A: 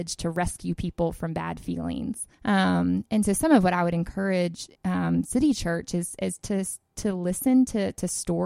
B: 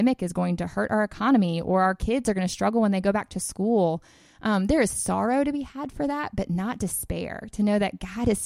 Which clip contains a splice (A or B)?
A